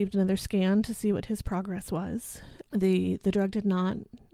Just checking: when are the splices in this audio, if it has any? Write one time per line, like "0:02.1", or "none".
0:02.7